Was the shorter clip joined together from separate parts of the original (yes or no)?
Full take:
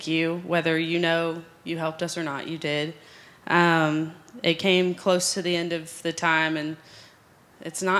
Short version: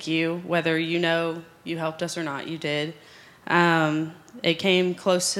no